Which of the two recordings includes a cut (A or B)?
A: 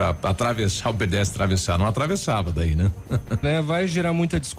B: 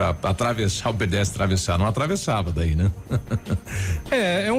A